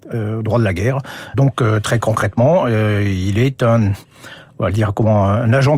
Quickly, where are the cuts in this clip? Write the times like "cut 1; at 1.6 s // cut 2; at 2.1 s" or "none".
cut 1; at 1.3 s